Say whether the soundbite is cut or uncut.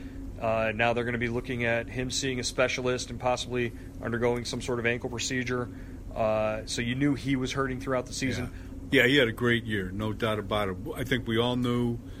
cut